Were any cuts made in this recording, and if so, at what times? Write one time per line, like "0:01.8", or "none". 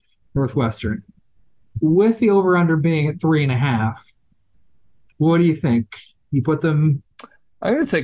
none